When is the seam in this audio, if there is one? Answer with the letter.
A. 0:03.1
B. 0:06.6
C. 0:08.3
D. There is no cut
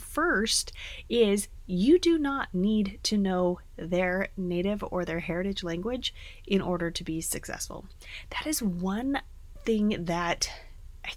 D